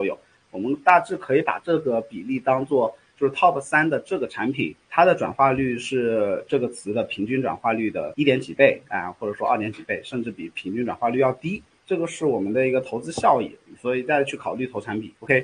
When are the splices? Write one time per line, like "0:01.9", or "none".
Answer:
0:11.8